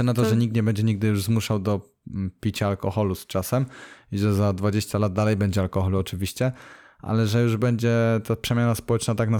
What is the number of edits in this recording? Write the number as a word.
zero